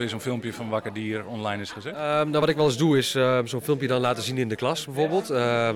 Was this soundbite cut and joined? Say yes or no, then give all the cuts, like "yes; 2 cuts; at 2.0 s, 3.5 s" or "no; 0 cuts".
no; 0 cuts